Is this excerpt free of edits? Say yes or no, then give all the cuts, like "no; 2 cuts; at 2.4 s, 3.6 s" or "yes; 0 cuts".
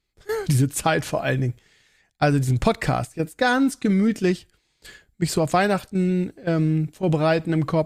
yes; 0 cuts